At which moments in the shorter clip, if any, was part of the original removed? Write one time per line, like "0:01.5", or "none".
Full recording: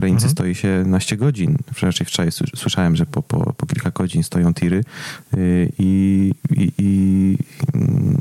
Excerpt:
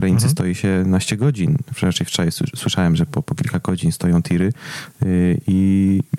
0:03.2